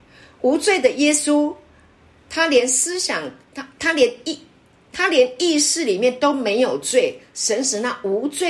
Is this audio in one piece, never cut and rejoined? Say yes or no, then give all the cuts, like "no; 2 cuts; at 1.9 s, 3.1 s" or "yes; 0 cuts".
yes; 0 cuts